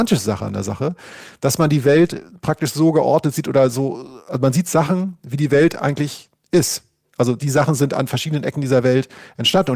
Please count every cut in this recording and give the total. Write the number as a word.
zero